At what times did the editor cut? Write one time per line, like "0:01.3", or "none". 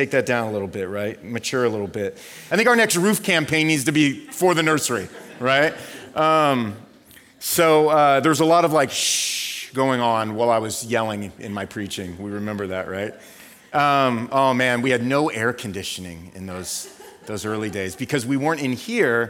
0:02.5